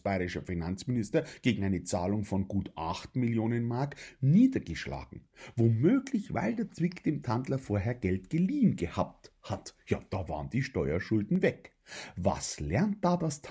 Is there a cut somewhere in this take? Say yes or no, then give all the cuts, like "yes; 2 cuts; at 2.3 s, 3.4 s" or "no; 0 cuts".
no; 0 cuts